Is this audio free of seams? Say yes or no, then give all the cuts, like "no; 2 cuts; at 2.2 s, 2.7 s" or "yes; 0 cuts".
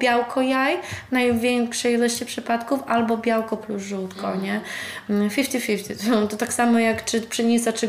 yes; 0 cuts